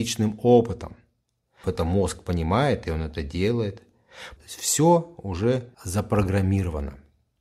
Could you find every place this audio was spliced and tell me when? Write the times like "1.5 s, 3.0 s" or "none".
1.6 s, 4.4 s, 5.7 s